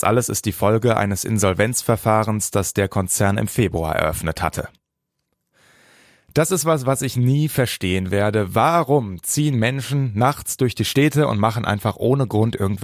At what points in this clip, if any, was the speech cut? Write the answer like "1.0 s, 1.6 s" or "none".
none